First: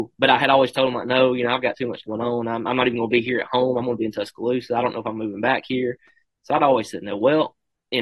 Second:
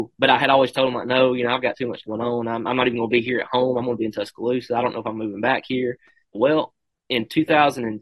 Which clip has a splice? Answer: second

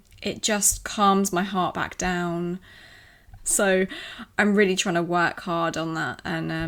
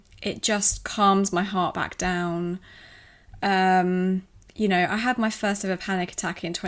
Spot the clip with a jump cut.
first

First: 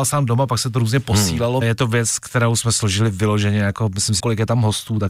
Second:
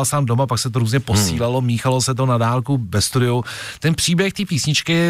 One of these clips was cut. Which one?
first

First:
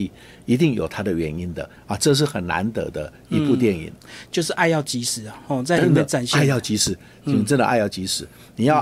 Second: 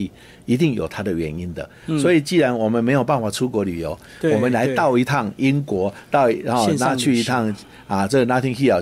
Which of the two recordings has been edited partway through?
first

